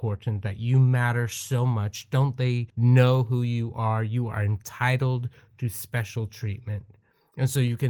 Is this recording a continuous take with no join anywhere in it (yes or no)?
yes